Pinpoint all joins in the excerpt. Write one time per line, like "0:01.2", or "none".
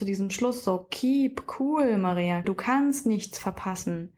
0:02.4